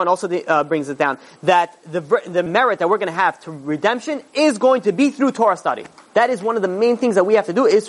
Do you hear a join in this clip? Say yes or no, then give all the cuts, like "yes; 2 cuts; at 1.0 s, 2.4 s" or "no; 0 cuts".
yes; 1 cut; at 2.5 s